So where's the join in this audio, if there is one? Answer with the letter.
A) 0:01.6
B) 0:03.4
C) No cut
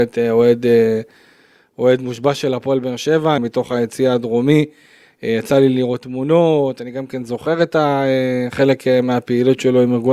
B